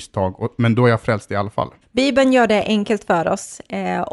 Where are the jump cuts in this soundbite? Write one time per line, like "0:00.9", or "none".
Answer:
0:01.8